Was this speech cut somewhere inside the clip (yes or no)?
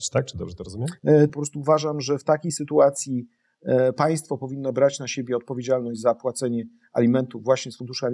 yes